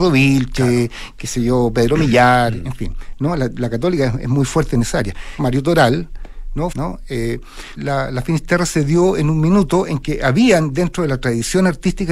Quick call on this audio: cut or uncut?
cut